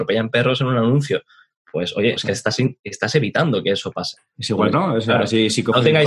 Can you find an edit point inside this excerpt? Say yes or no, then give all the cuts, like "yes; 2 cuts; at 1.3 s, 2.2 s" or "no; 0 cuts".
yes; 2 cuts; at 2.2 s, 4.7 s